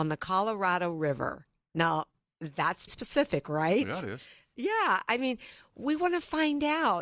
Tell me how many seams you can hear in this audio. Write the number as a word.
one